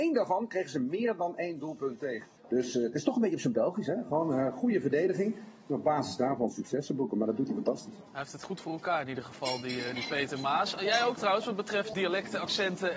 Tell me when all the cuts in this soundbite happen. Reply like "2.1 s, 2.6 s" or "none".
2.4 s, 11.9 s